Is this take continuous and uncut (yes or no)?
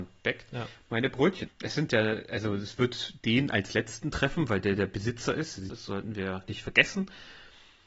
no